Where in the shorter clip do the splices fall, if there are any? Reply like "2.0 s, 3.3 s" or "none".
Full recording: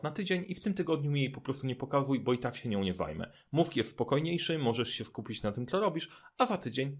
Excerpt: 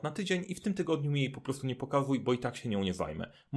none

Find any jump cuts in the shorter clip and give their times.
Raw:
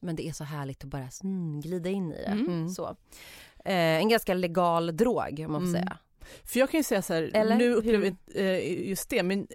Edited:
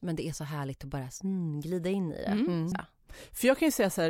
2.7 s

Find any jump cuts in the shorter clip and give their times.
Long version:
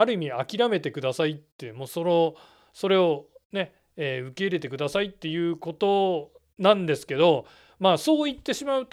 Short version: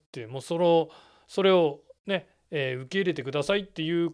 none

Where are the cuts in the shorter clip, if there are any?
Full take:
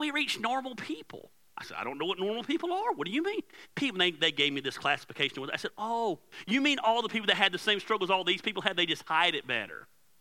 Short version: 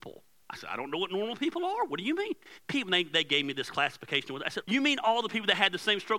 4.6 s

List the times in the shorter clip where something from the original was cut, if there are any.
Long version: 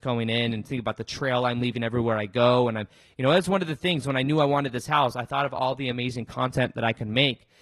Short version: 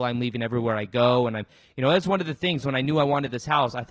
none

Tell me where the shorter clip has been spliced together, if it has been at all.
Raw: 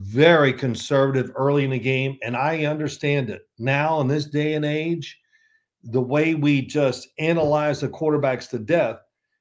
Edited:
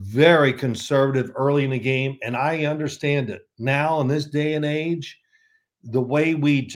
none

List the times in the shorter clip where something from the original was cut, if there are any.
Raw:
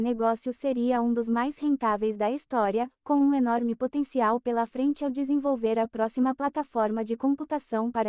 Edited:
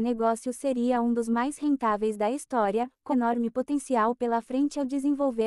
3.1 s

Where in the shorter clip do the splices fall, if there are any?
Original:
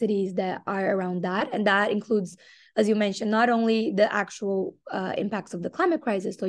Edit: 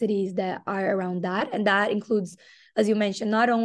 none

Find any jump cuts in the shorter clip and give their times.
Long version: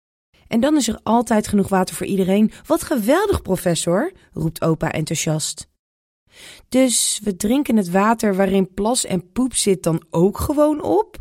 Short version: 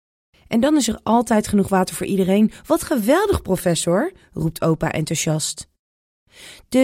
none

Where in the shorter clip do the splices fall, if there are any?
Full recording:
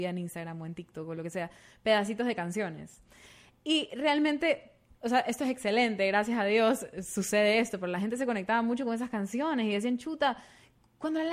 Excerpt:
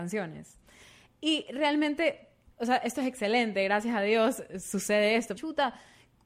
5.4 s

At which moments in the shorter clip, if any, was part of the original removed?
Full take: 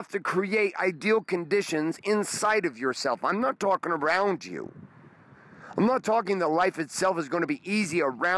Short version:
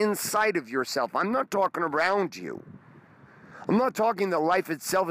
none

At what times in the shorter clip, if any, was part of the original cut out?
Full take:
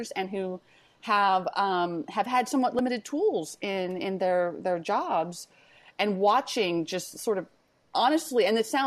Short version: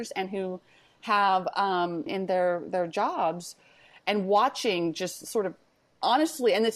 2.1 s

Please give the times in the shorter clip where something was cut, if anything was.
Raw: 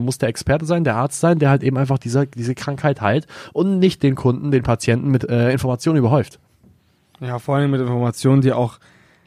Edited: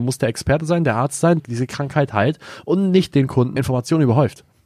1.4 s, 3.6 s

